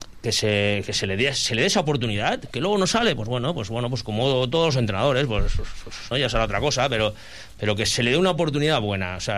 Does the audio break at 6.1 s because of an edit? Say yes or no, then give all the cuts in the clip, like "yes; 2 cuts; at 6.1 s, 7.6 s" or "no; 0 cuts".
yes; 1 cut; at 6.1 s